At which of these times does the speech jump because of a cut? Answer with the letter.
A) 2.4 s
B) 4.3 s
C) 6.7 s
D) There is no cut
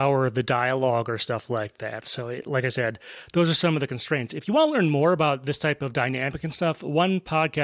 D